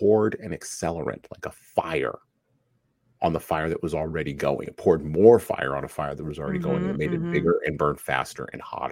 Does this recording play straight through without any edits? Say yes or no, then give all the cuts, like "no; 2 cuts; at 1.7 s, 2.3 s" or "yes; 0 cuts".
yes; 0 cuts